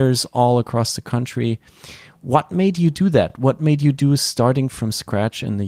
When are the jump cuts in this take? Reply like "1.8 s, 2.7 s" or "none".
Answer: none

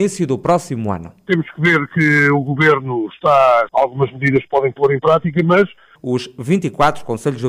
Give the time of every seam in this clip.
3.7 s, 6.0 s

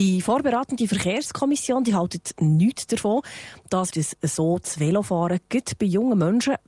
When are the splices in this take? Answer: 3.9 s

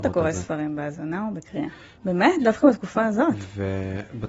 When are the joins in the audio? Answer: 2.0 s

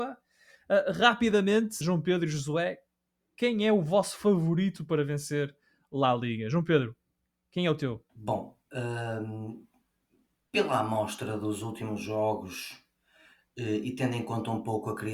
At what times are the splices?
1.8 s, 8.1 s

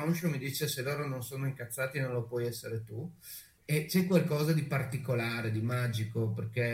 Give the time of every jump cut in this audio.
none

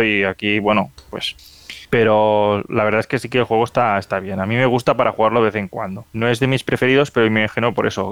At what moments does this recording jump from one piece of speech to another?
none

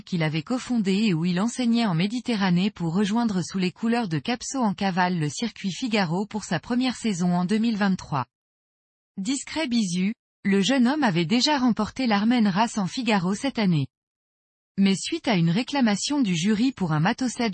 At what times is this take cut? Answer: none

